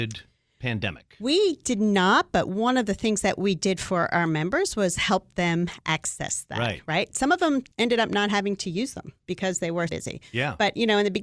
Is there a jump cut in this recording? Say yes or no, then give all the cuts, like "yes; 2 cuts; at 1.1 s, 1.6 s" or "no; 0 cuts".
yes; 2 cuts; at 7.7 s, 9.9 s